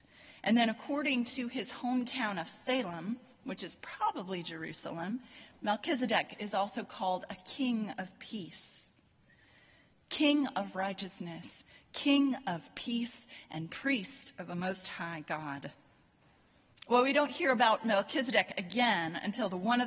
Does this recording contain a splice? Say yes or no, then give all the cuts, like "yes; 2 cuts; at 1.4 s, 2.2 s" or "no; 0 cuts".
no; 0 cuts